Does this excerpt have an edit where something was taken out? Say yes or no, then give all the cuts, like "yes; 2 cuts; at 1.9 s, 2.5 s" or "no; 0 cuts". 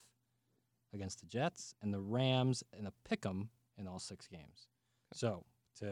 no; 0 cuts